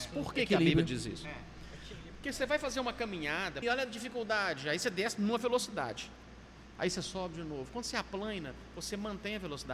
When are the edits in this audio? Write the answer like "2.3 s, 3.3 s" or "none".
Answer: 3.6 s

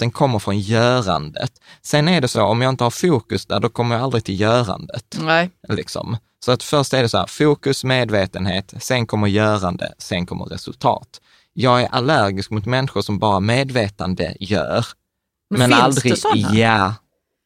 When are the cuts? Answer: none

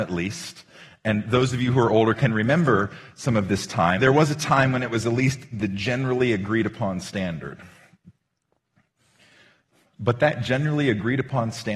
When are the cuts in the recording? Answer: 4.0 s

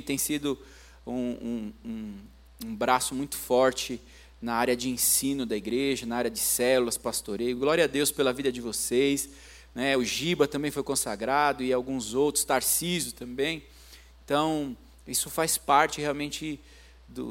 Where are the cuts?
none

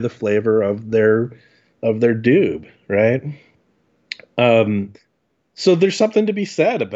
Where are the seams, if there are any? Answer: none

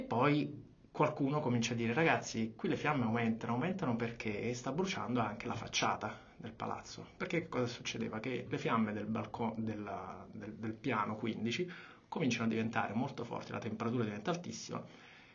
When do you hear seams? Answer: none

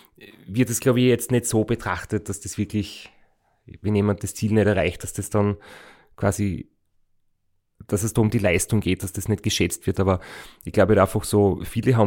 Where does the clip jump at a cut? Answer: 9.9 s

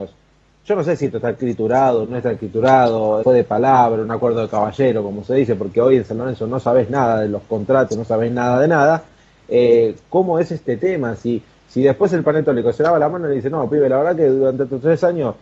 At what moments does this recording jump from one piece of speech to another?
3.2 s, 7.9 s

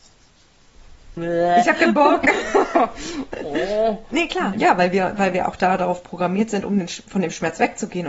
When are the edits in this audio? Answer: 1.2 s, 4.5 s

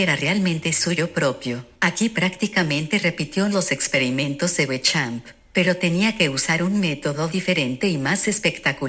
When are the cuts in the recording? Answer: 1.8 s

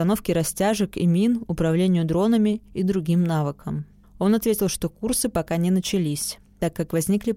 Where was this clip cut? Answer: 4.0 s

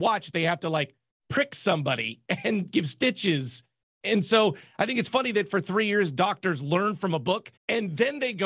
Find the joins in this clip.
7.6 s

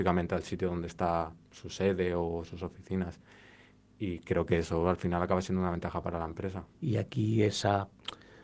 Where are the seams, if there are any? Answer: 6.8 s

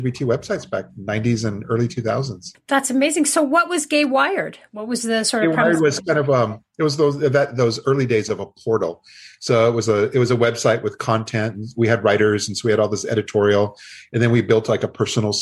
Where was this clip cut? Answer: none

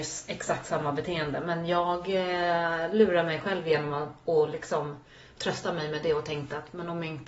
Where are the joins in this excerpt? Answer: none

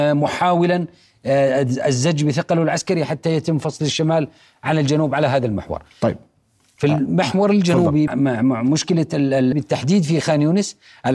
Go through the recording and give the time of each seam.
8.1 s, 9.5 s

